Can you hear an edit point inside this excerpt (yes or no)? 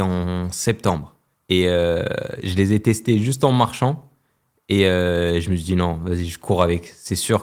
yes